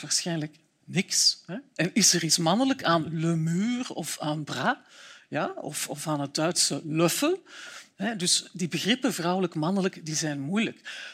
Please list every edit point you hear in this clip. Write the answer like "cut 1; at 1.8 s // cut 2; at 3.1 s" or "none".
none

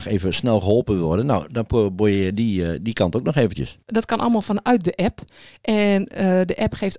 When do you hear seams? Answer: cut 1; at 3.8 s

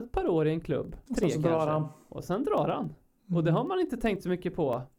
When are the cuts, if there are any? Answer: cut 1; at 1.1 s

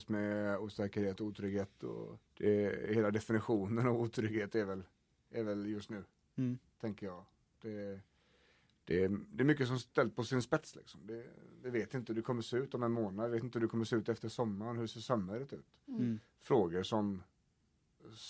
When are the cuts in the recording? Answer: cut 1; at 2.3 s

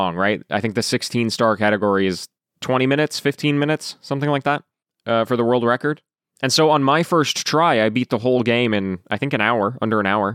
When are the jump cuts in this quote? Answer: none

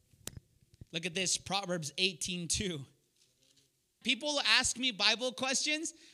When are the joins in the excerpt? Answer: cut 1; at 4.0 s

